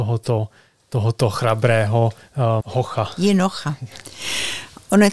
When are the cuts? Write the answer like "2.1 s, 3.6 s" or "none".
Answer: 2.6 s